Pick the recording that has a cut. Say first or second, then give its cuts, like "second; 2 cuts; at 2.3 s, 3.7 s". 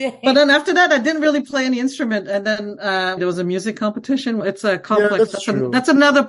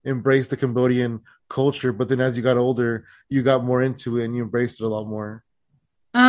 first; 2 cuts; at 3.2 s, 4.4 s